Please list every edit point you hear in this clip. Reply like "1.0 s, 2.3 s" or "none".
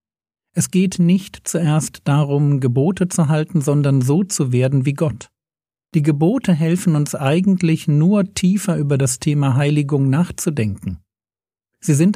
none